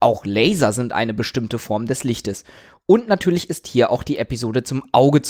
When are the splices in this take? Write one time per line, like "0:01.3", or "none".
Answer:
none